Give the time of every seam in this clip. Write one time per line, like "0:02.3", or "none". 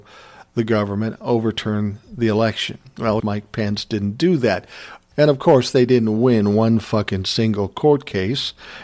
0:03.2
0:05.1